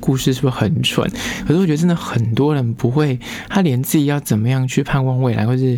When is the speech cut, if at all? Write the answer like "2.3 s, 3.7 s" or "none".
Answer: none